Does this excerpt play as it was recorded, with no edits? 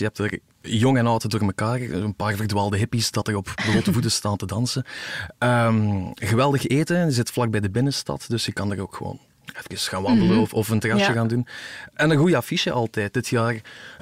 yes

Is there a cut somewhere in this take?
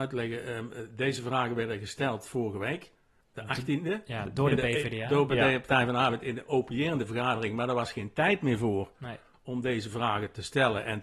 no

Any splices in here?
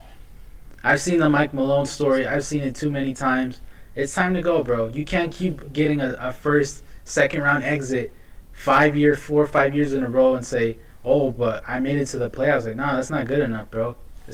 no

